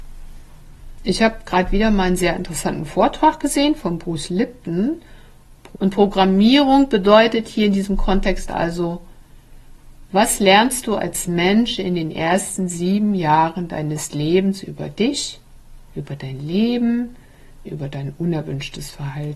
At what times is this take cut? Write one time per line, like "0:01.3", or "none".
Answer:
0:05.7
0:15.9
0:17.6